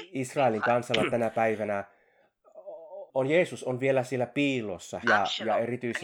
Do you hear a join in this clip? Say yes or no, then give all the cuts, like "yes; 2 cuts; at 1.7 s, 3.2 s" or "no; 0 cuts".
yes; 2 cuts; at 3.1 s, 5.0 s